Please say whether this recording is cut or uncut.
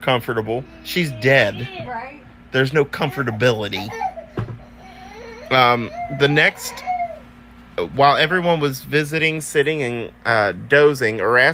uncut